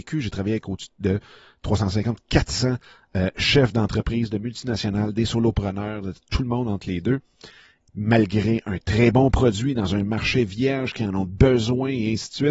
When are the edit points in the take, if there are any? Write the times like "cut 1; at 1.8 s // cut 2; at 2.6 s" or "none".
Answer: cut 1; at 7.8 s